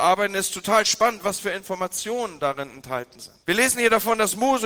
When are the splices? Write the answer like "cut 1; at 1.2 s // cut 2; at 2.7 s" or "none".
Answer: cut 1; at 3.4 s